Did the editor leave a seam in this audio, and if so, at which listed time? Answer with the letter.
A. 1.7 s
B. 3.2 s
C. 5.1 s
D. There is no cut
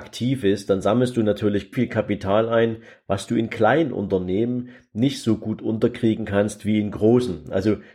A